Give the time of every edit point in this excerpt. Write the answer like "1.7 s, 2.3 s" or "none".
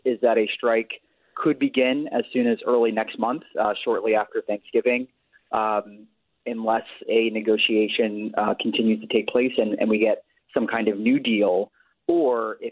none